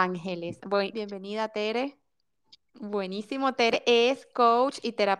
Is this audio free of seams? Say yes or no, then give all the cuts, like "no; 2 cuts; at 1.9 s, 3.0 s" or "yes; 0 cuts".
no; 2 cuts; at 0.9 s, 2.7 s